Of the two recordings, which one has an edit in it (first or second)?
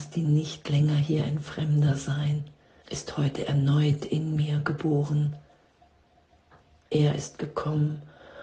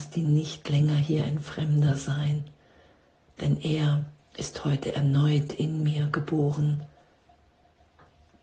first